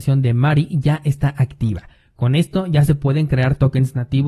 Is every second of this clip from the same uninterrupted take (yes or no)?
yes